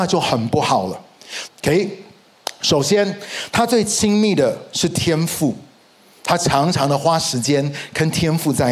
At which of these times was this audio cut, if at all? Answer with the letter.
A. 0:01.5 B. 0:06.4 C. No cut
A